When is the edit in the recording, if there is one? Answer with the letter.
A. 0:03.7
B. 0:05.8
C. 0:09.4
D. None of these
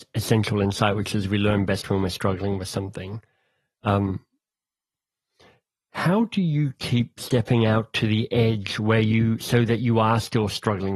D